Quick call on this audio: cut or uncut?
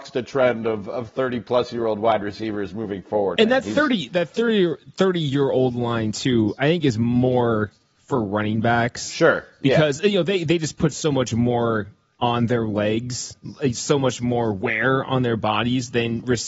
cut